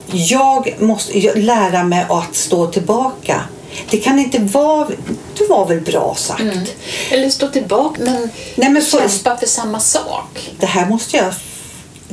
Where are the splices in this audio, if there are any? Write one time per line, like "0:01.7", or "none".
0:08.0
0:10.6